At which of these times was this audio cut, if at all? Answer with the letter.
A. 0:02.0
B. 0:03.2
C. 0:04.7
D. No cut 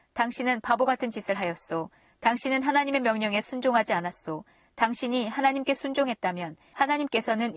D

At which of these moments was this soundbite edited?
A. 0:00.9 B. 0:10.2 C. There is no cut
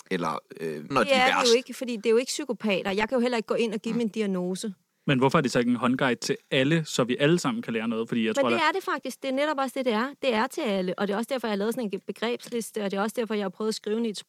A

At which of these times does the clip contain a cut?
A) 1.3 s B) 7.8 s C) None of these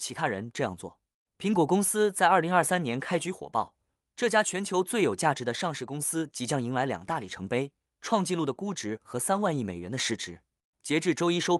A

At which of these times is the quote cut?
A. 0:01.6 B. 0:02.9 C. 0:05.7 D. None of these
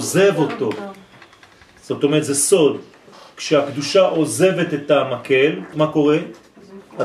C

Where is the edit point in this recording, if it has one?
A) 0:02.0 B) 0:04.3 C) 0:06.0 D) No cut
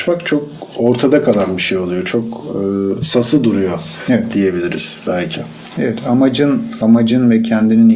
D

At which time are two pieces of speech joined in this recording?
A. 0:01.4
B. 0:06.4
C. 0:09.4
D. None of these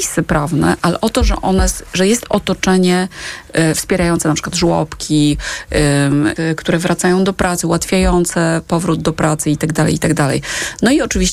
B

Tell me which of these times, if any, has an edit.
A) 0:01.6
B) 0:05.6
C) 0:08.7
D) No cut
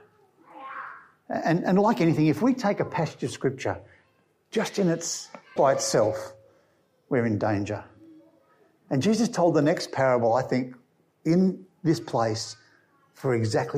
B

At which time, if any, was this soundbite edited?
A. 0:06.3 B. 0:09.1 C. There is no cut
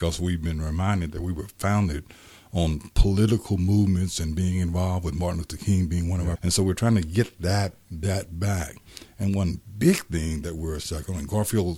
A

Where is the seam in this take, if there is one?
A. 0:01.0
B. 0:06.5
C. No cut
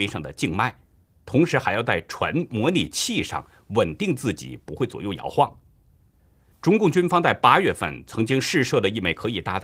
B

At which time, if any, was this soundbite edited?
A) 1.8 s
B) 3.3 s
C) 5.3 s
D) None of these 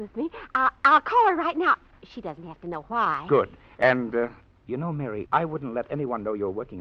C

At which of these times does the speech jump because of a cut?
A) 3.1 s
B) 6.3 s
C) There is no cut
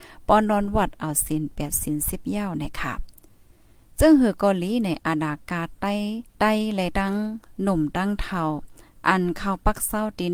B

